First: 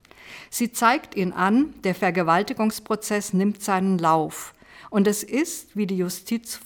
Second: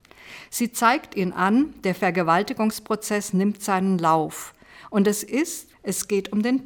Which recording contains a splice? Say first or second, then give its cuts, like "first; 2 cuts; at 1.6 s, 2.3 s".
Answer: second; 1 cut; at 5.7 s